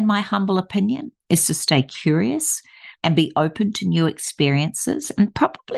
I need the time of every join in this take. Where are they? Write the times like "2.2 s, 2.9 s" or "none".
3.0 s